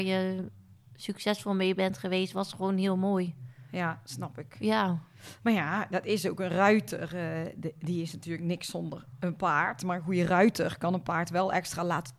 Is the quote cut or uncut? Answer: uncut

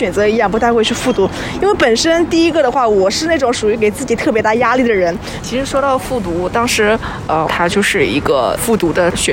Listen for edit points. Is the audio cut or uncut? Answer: cut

